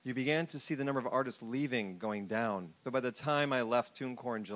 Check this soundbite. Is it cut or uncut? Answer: cut